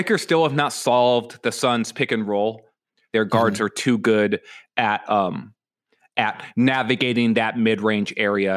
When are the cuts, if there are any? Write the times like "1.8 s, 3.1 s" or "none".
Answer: 3.1 s